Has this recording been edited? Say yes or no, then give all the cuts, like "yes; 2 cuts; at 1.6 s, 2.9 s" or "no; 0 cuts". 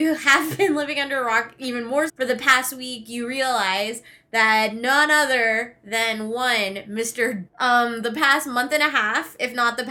yes; 2 cuts; at 2.1 s, 7.5 s